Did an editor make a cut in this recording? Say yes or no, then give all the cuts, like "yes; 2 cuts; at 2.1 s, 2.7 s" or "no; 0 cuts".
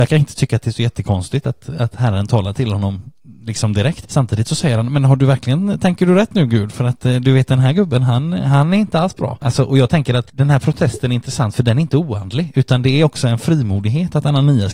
no; 0 cuts